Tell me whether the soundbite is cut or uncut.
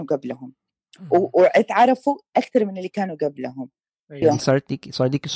cut